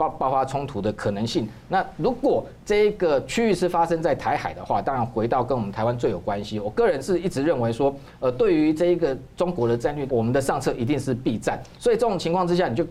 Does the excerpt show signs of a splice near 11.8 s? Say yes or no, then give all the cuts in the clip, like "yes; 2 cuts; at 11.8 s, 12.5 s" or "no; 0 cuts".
yes; 3 cuts; at 5.7 s, 10.1 s, 11.8 s